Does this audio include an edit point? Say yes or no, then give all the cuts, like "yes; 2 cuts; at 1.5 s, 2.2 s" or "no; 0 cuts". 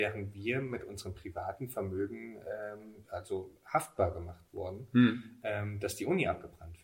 yes; 1 cut; at 3.0 s